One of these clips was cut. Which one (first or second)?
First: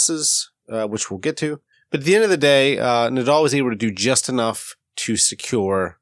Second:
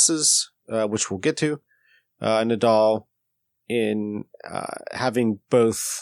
first